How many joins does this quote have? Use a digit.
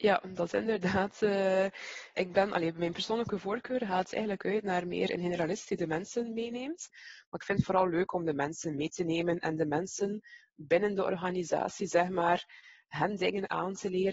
2